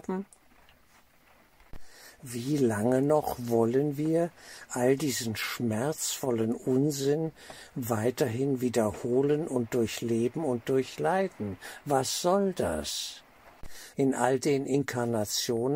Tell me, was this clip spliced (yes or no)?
yes